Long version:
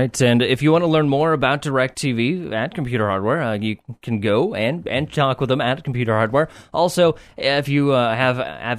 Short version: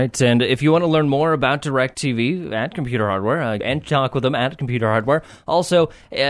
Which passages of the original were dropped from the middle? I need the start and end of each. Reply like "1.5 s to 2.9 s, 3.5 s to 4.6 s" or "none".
3.6 s to 4.8 s